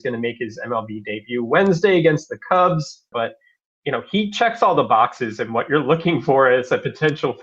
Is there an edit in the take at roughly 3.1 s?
yes; 1 cut; at 3.1 s

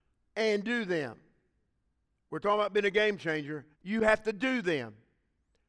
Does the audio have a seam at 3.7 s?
yes; 1 cut; at 3.7 s

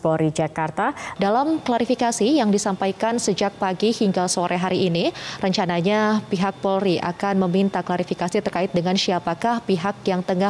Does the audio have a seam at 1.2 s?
yes; 1 cut; at 1.2 s

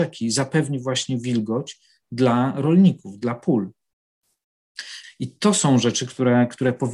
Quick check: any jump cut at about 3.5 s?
no; 1 cut; at 5.0 s

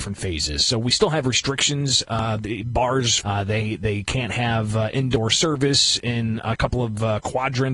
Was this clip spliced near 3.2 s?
yes; 1 cut; at 3.2 s

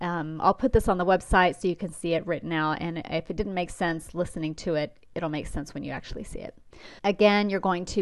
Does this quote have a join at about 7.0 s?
yes; 1 cut; at 7.0 s

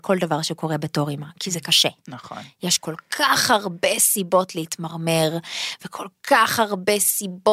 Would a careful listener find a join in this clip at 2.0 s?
no; 0 cuts

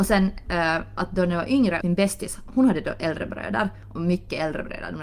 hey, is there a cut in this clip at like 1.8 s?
yes; 1 cut; at 1.8 s

